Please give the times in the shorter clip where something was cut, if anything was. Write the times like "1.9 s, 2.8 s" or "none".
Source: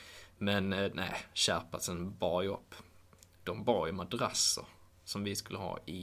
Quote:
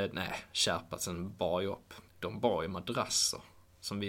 2.1 s